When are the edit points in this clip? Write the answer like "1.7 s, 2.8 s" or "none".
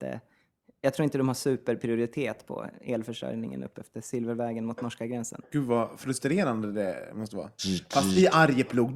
5.4 s, 7.6 s